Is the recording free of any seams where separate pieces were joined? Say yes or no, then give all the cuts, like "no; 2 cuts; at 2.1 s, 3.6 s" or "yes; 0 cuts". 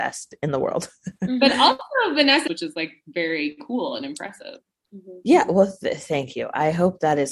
no; 1 cut; at 2.5 s